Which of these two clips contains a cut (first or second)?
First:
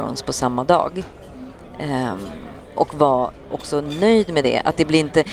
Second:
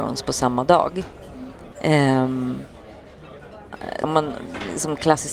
second